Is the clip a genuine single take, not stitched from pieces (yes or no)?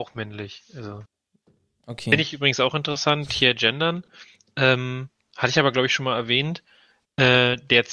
yes